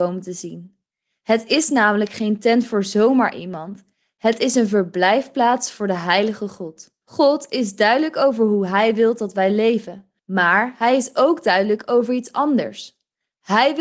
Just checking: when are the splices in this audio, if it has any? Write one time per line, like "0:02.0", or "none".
0:07.0
0:10.2